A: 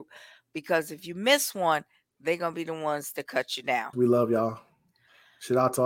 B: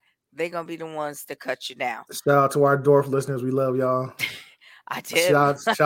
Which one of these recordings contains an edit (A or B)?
A